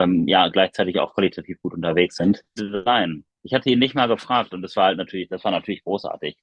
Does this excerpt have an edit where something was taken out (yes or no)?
yes